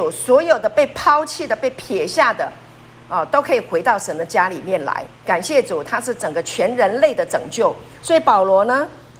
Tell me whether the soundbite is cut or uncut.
cut